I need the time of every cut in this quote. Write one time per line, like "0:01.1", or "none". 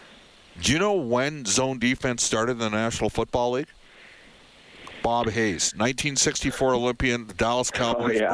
none